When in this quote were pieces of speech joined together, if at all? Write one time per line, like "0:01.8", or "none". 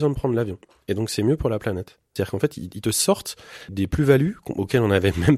0:02.2
0:03.7